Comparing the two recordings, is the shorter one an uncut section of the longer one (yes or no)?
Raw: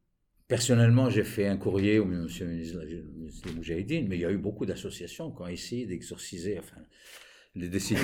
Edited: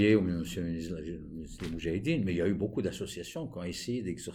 yes